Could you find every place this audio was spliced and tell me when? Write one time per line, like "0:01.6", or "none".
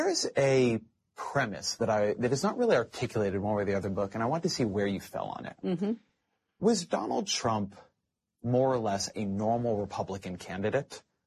none